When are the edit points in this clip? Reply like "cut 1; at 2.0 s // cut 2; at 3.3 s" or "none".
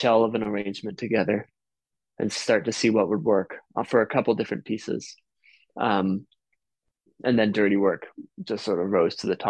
none

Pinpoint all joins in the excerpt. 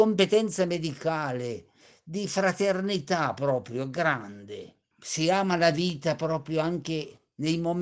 cut 1; at 4.9 s

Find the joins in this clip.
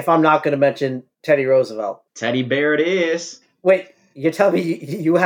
none

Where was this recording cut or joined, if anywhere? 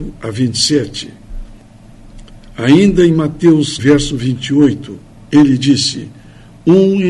cut 1; at 3.8 s // cut 2; at 5.1 s

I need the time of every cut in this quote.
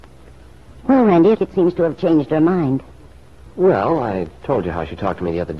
cut 1; at 1.3 s // cut 2; at 3.5 s

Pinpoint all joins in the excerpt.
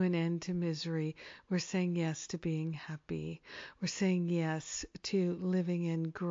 none

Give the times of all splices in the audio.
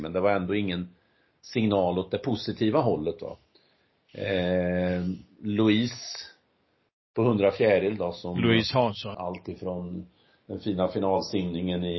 cut 1; at 9.1 s

